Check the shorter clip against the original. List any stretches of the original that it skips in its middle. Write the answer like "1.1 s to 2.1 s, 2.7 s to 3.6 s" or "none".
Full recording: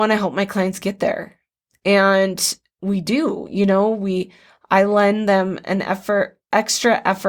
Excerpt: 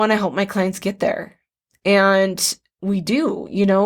none